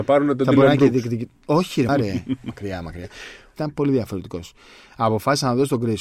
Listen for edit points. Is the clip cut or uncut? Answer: cut